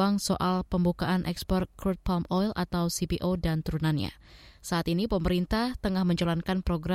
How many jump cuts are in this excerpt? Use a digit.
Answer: 0